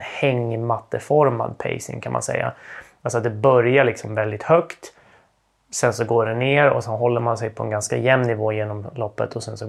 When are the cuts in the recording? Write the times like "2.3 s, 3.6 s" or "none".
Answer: none